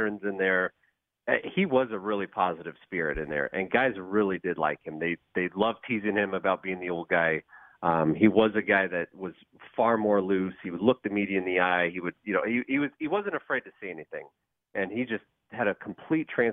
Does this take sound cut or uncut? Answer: uncut